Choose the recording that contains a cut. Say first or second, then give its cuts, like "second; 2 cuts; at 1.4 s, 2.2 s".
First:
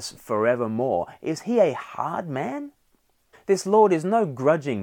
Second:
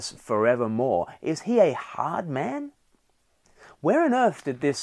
first; 1 cut; at 3.3 s